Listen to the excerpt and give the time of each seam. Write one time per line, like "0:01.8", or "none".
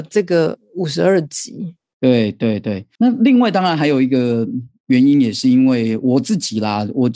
none